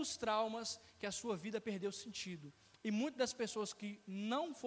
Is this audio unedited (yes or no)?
yes